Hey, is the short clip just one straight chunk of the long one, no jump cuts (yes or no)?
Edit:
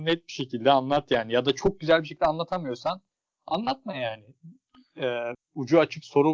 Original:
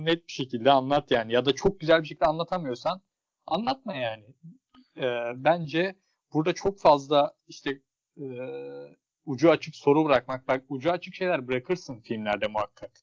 no